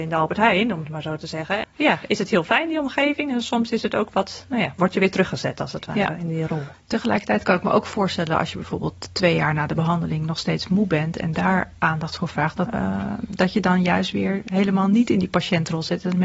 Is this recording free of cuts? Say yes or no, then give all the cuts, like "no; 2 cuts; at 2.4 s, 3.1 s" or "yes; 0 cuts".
no; 2 cuts; at 1.6 s, 12.7 s